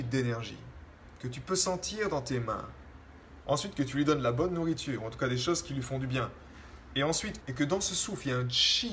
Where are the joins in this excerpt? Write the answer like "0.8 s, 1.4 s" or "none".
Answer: 3.4 s, 7.4 s